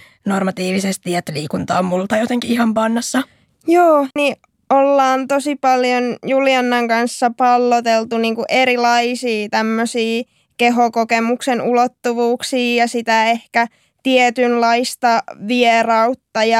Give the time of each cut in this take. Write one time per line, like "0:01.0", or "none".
0:04.2